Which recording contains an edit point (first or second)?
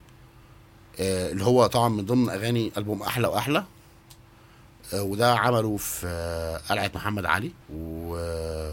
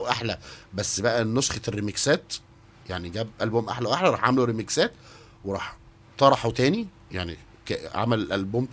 first